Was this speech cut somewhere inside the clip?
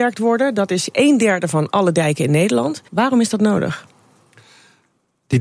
yes; 1 cut; at 2.9 s

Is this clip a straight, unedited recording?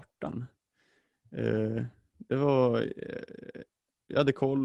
yes; 0 cuts

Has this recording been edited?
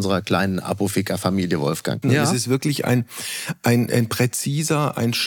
yes; 1 cut; at 2.0 s

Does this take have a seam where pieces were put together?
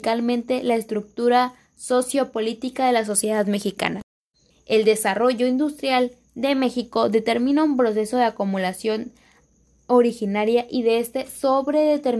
yes; 1 cut; at 4.5 s

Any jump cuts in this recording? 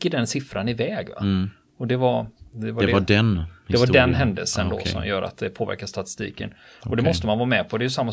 no; 0 cuts

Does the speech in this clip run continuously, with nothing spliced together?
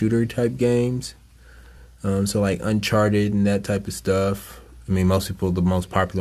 yes; 0 cuts

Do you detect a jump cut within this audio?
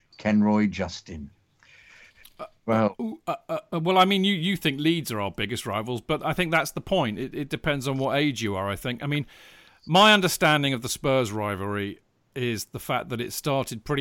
no; 0 cuts

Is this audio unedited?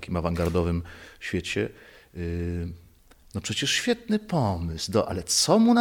yes; 0 cuts

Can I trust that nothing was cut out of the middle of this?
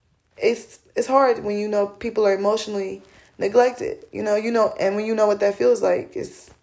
yes; 0 cuts

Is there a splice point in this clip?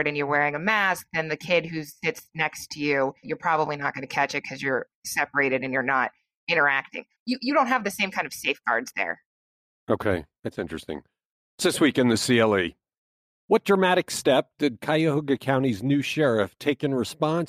yes; 2 cuts; at 3.2 s, 7.2 s

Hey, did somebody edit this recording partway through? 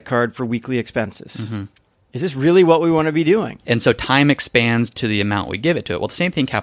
yes; 2 cuts; at 1.9 s, 3.6 s

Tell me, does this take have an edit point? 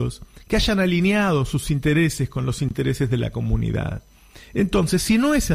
no; 0 cuts

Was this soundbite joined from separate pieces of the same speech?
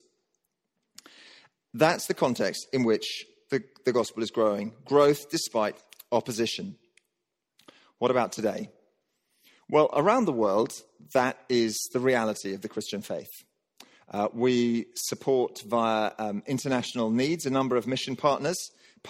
no; 0 cuts

